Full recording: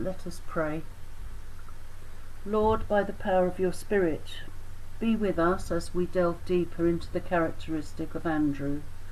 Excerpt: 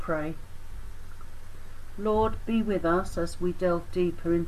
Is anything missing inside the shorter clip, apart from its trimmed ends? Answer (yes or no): yes